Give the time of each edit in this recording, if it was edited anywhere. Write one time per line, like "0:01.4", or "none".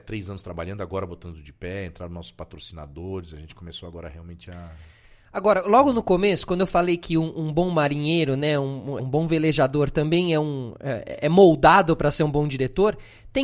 0:09.0